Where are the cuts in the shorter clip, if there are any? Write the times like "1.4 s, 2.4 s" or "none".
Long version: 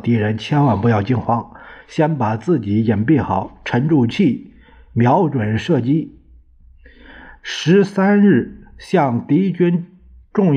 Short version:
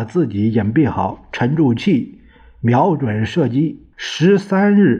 3.9 s